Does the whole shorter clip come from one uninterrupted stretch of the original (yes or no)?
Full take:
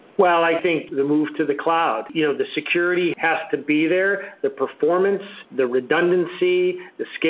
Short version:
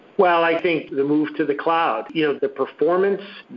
no